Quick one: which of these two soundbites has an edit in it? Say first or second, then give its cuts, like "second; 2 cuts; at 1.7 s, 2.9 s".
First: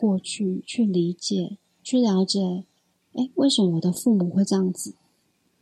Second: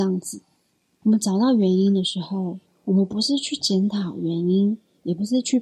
second; 1 cut; at 1.0 s